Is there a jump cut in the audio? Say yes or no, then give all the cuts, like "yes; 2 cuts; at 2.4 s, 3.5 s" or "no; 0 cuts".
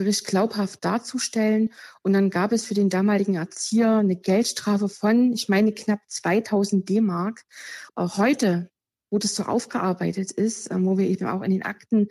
yes; 1 cut; at 7.9 s